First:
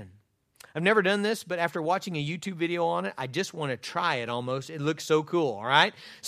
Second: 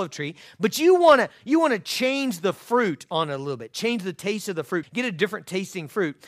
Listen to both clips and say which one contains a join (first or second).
second